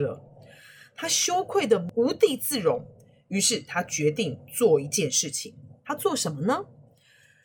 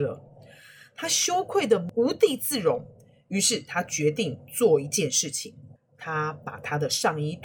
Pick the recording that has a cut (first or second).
second